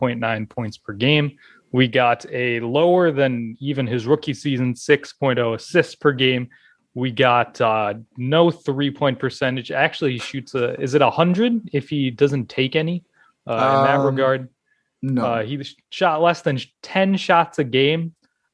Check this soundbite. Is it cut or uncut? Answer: uncut